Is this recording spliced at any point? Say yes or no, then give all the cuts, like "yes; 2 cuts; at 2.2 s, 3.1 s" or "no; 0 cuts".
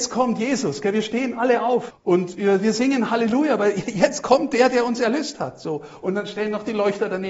yes; 1 cut; at 1.9 s